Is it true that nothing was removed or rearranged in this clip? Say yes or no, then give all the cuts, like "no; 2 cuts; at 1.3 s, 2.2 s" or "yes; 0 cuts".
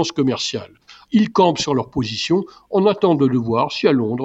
no; 1 cut; at 1.0 s